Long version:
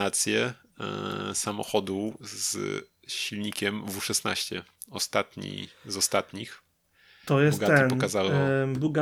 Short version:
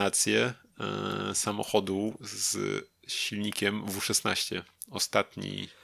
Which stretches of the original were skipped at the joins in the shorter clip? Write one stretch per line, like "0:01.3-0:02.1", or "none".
none